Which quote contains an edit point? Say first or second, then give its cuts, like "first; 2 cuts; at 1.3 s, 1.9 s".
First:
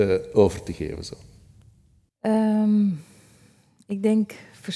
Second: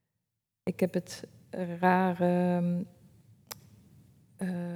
first; 1 cut; at 2.1 s